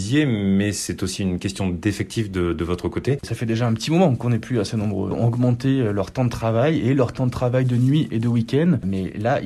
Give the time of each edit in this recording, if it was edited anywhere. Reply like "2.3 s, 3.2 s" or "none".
3.2 s, 5.1 s